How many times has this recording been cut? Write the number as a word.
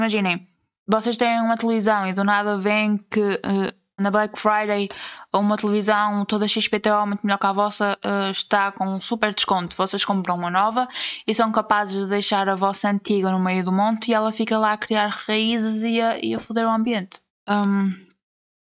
two